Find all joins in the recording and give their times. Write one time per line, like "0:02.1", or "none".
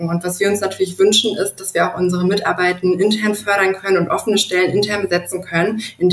none

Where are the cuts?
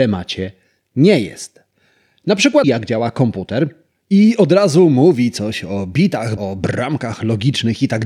0:02.6
0:06.4

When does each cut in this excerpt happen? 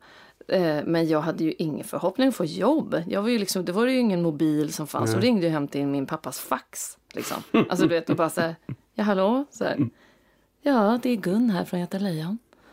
0:07.5

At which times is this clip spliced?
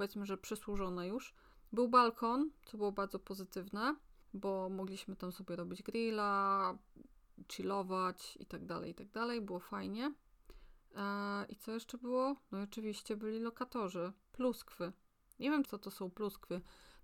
0:14.2
0:15.6

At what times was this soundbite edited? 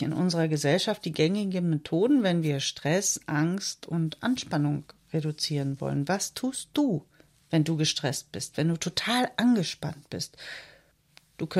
none

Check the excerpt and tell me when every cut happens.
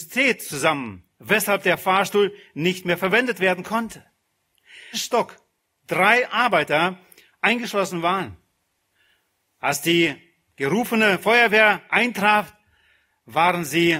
0:04.9

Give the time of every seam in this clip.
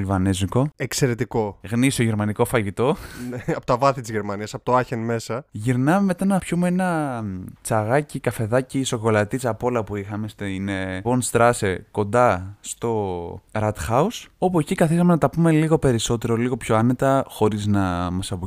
0:11.0

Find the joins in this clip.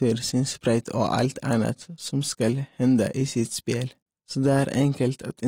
0:04.2

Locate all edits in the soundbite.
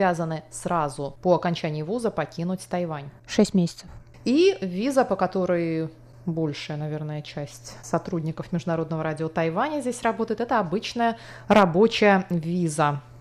none

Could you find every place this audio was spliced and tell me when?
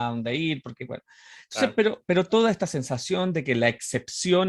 none

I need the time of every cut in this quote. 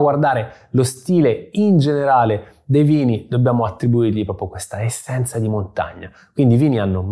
none

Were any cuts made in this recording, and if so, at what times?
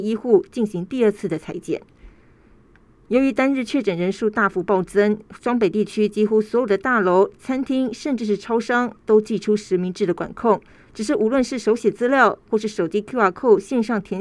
none

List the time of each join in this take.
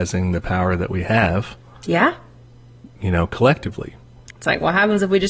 0:04.3

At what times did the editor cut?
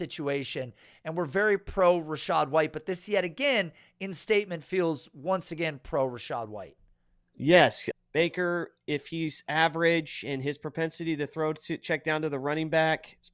0:07.9

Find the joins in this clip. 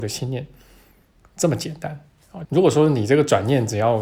0:02.4

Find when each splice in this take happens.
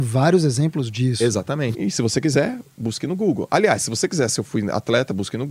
0:01.7

